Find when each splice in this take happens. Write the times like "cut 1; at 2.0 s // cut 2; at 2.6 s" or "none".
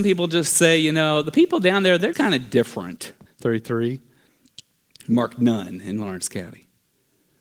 cut 1; at 2.1 s // cut 2; at 3.3 s